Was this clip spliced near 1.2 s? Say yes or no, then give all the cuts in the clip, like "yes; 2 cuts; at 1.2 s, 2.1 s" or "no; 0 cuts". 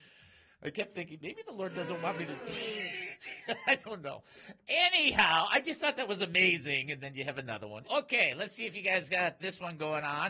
no; 2 cuts; at 7.8 s, 9.4 s